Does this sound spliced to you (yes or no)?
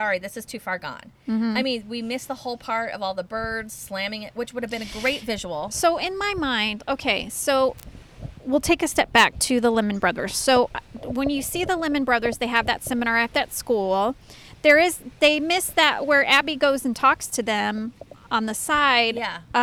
no